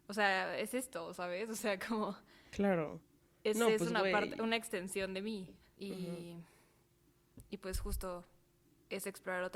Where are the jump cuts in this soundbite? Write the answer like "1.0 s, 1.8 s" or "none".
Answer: 5.7 s

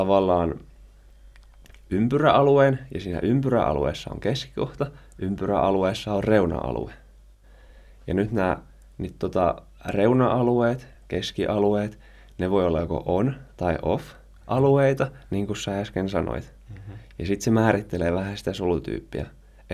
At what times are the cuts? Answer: none

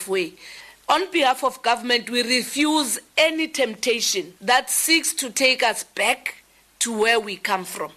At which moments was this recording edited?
4.4 s

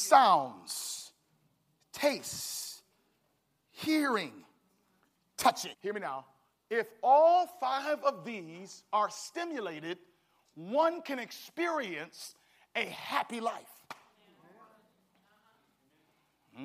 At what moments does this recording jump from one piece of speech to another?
5.7 s

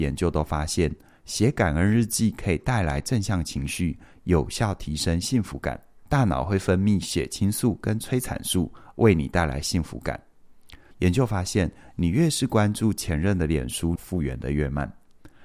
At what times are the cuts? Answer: 6.0 s, 10.9 s, 14.0 s

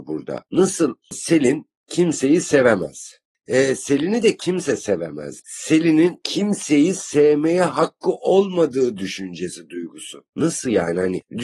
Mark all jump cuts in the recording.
5.4 s, 10.3 s

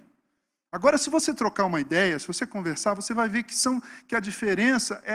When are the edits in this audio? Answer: none

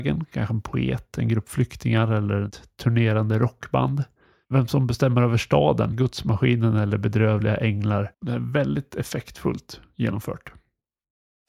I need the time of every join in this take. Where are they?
5.9 s, 8.1 s

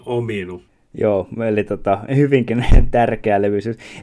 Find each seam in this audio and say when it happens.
2.1 s

